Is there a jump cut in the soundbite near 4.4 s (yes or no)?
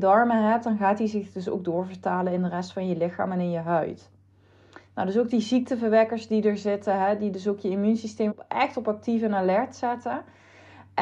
no